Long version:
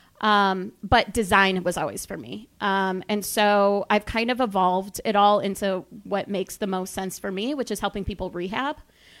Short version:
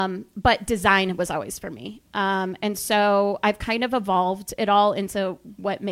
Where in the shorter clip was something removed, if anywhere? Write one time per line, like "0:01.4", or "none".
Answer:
none